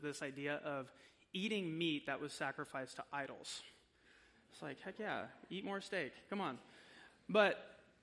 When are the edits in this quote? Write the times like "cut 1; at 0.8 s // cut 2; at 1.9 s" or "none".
cut 1; at 4.3 s